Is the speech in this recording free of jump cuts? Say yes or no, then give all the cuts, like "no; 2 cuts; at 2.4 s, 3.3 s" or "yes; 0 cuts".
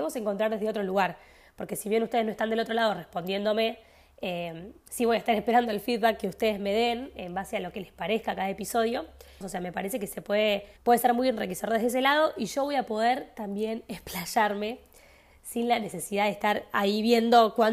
no; 2 cuts; at 9.4 s, 10.8 s